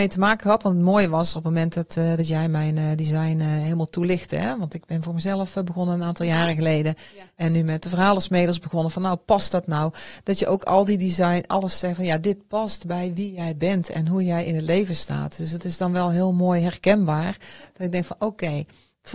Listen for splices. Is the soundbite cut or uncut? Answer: uncut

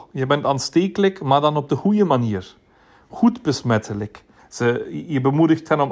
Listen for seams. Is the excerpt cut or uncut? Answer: cut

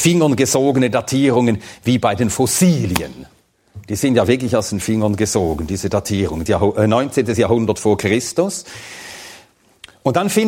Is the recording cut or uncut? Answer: cut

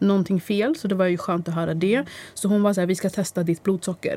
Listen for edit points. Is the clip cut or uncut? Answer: uncut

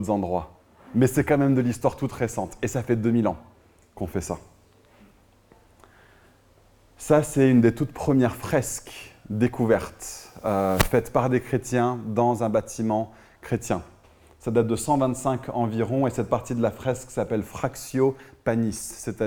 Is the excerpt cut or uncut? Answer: uncut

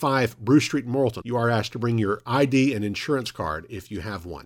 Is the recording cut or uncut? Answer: cut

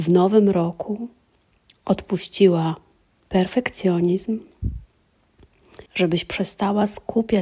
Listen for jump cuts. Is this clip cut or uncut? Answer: cut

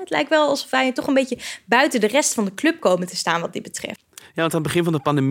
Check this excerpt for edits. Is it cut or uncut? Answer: cut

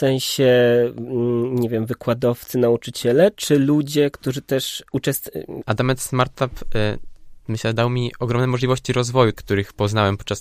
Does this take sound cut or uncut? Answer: cut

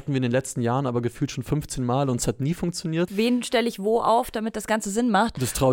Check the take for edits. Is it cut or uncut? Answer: cut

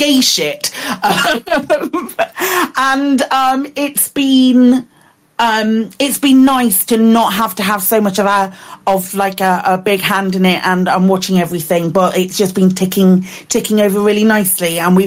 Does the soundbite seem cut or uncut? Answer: uncut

